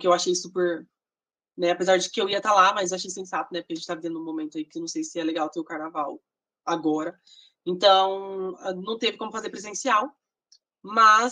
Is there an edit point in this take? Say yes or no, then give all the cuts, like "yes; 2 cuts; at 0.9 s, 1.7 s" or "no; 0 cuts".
no; 0 cuts